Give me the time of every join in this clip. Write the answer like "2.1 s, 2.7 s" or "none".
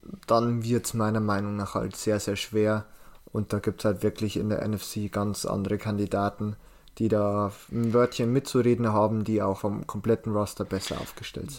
9.6 s